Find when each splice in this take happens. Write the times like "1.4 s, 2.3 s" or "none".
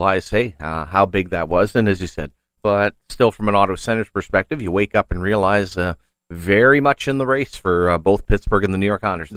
2.6 s